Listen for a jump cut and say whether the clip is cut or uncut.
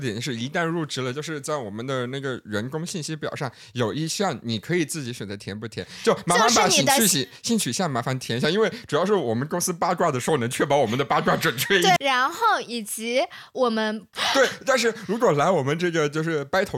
cut